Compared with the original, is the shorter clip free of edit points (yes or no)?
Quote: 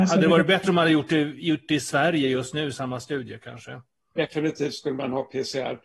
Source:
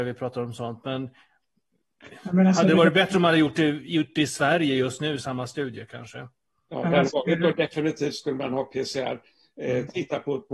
no